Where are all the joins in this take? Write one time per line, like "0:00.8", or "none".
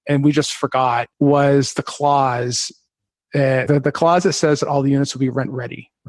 0:01.1
0:03.7